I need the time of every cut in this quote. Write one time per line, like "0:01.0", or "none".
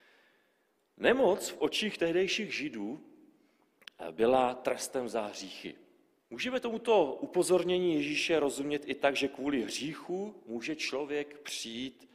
0:06.2